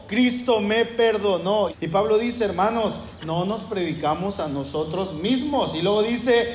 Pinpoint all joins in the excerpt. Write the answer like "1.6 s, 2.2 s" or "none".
1.7 s

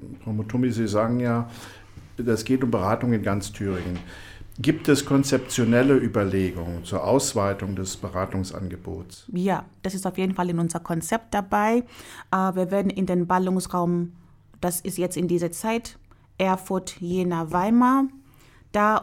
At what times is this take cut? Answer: none

